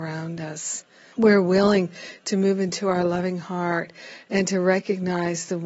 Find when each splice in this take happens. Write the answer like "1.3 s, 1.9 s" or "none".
1.1 s

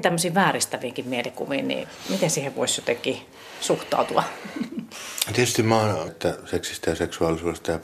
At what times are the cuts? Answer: 6.1 s

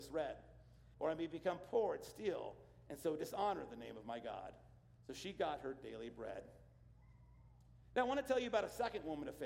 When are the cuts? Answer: 0.9 s

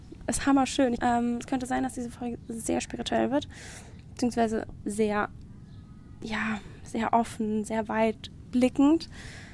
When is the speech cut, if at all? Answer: 1.0 s

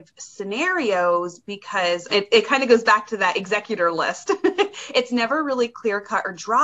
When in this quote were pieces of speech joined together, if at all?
2.1 s

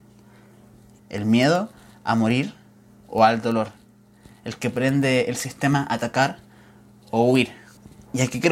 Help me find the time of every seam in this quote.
1.0 s

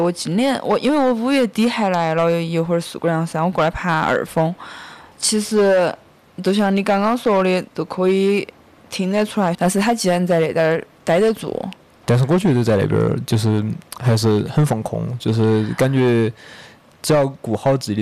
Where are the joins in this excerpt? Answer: 5.1 s, 7.7 s, 9.5 s

